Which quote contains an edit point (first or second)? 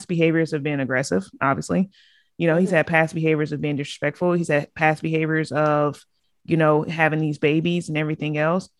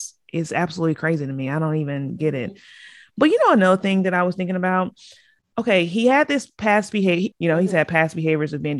second